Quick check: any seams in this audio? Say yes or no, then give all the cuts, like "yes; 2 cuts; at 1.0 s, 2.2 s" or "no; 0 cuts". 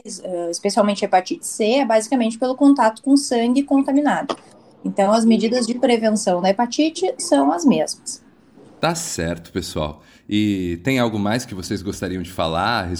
no; 0 cuts